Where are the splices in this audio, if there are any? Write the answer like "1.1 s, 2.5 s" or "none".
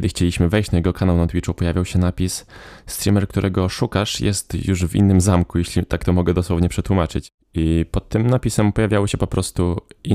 none